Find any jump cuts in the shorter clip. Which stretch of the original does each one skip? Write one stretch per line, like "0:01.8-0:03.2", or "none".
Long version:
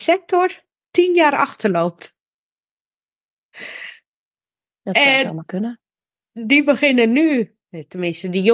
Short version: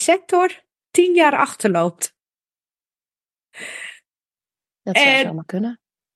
none